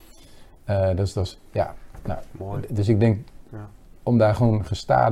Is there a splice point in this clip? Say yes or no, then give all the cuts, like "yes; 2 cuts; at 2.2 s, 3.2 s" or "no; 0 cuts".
no; 0 cuts